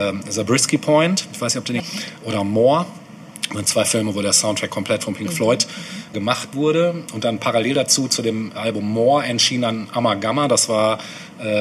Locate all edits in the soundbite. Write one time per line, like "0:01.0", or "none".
0:01.8
0:06.1